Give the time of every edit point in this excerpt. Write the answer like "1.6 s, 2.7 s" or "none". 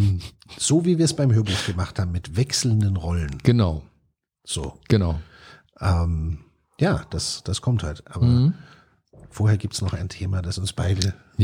none